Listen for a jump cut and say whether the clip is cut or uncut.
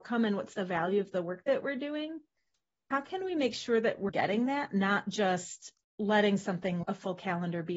cut